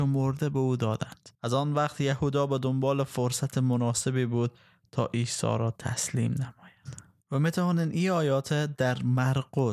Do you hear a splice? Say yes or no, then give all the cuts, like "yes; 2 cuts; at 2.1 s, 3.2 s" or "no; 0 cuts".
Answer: yes; 1 cut; at 1.3 s